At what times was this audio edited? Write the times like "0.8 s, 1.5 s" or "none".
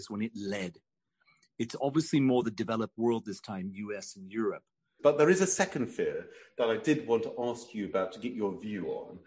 5.0 s